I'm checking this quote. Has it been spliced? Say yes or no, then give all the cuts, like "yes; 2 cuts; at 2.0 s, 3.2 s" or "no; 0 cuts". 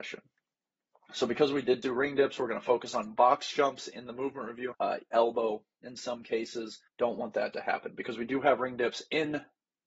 yes; 3 cuts; at 1.8 s, 4.7 s, 6.9 s